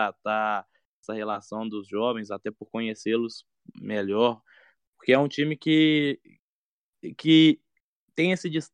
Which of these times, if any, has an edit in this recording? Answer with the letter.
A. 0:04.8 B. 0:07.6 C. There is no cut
C